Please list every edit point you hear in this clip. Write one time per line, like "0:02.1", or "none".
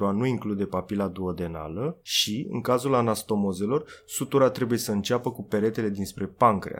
none